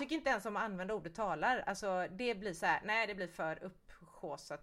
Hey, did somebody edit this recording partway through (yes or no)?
no